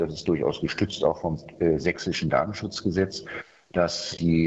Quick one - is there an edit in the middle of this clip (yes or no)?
no